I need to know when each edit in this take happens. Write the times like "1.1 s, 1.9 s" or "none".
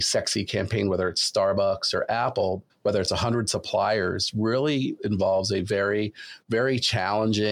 2.7 s